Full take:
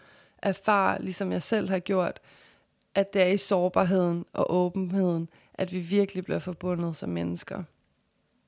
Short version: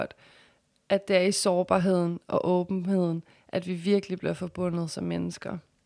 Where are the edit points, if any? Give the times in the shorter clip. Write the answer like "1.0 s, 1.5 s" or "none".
none